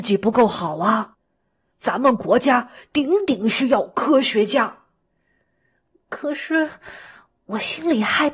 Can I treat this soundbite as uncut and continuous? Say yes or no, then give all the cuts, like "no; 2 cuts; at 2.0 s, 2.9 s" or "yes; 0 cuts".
no; 1 cut; at 1.7 s